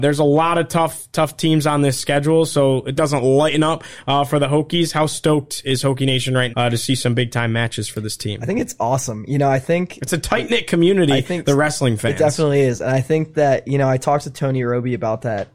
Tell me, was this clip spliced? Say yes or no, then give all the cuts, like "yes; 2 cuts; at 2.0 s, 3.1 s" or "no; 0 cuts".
yes; 2 cuts; at 3.0 s, 6.5 s